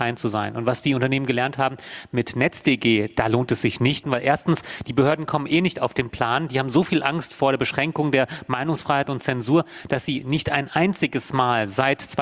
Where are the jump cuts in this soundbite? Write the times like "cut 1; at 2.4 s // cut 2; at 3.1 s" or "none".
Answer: cut 1; at 4.0 s